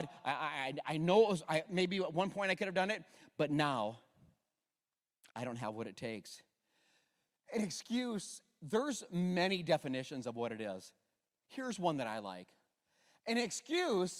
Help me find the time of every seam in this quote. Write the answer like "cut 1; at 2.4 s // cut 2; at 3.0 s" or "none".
none